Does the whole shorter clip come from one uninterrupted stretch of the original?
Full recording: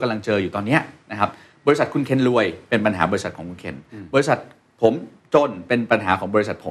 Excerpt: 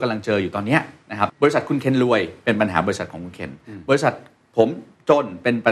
no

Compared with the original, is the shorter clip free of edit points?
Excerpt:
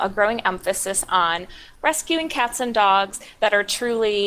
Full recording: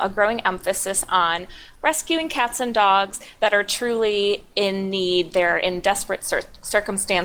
yes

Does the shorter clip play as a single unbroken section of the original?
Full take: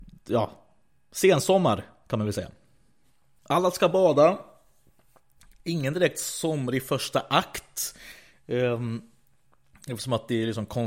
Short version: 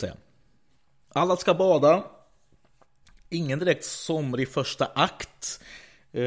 yes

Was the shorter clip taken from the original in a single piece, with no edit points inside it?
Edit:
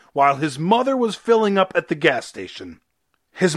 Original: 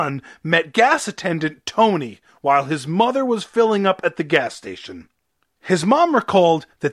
yes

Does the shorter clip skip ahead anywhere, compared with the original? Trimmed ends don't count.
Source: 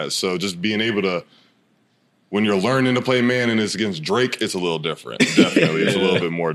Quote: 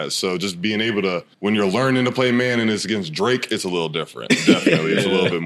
yes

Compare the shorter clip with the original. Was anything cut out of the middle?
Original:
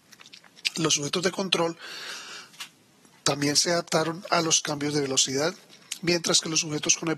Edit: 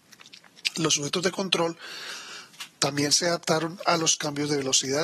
yes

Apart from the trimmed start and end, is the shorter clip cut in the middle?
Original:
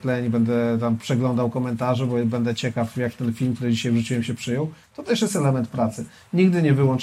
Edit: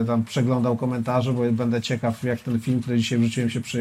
no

